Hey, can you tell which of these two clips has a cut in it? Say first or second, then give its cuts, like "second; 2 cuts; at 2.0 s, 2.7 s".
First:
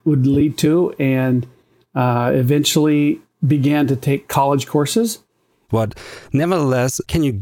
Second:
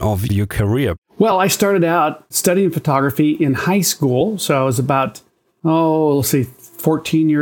first; 1 cut; at 5.7 s